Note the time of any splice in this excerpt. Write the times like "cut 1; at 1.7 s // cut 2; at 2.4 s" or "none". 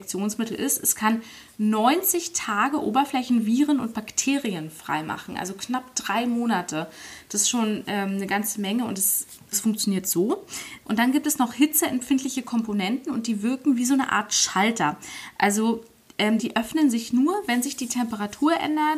cut 1; at 9.5 s // cut 2; at 10.8 s // cut 3; at 16.4 s

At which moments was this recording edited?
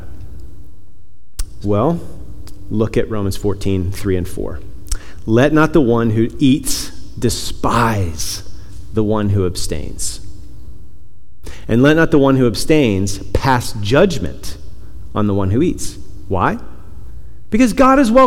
cut 1; at 1.6 s

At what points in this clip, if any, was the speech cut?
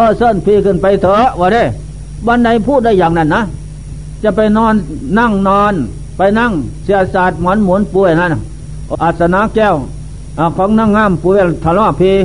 cut 1; at 8.9 s

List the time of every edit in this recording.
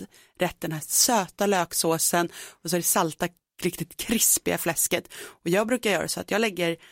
none

